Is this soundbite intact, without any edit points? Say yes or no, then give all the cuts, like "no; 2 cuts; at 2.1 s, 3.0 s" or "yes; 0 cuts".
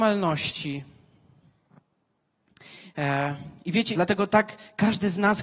no; 1 cut; at 3.9 s